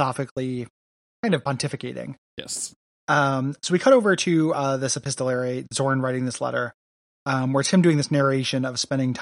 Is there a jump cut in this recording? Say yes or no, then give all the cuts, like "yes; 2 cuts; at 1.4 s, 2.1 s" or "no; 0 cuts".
yes; 1 cut; at 2.3 s